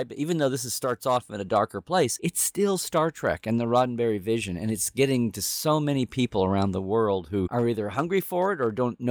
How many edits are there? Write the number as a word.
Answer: zero